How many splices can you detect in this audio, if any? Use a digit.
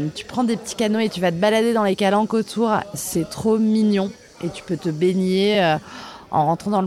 0